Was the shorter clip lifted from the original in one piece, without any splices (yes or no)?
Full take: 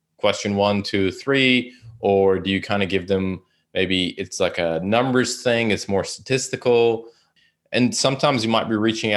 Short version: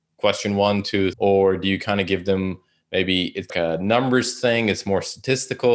no